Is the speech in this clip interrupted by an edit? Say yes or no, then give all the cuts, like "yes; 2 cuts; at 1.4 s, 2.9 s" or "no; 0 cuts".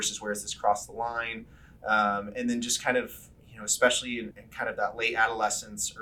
yes; 1 cut; at 4.3 s